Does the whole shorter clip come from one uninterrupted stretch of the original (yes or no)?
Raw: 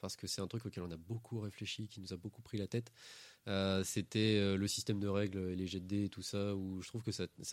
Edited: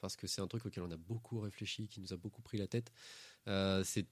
yes